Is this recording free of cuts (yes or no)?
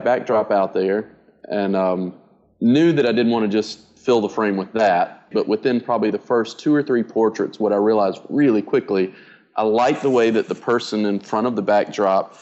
no